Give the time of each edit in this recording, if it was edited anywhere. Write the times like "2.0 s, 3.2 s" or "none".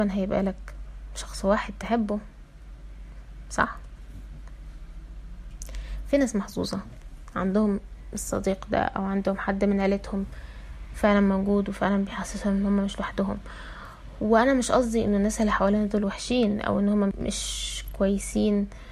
17.1 s